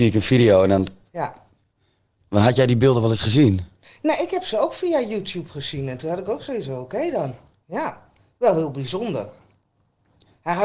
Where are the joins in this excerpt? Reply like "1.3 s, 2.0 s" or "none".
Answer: none